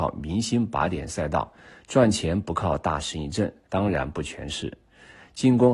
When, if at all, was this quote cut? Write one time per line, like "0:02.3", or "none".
0:03.7